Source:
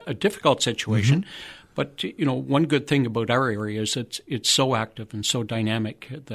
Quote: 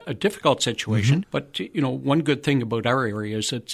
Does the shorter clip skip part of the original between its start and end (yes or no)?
yes